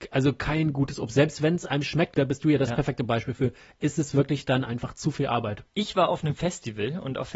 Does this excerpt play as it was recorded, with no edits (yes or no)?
no